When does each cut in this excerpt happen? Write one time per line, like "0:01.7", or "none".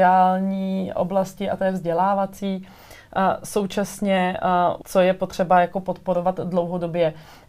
0:04.8